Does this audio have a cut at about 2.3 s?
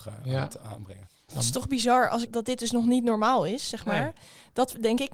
yes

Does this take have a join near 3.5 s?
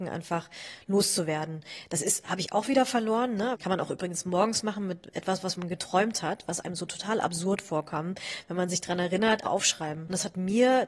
yes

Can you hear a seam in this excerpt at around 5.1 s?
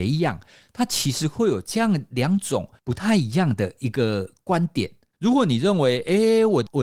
yes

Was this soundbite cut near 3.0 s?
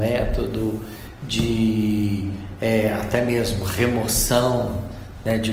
no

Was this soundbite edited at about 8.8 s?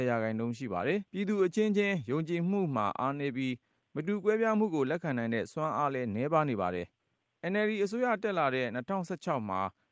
no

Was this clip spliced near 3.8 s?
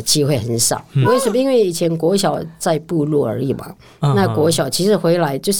no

